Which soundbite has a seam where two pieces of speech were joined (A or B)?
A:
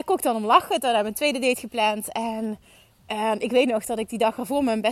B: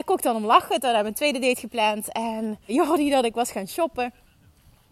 B